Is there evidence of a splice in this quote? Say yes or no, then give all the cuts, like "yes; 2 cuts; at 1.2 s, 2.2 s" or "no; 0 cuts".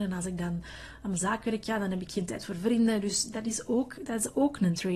no; 0 cuts